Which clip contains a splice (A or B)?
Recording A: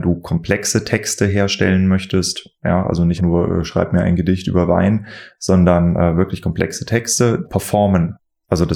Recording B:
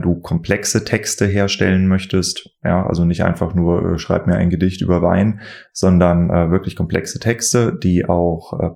A